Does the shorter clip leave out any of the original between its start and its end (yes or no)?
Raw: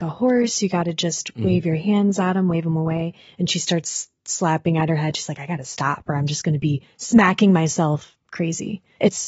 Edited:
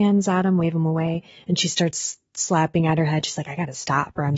no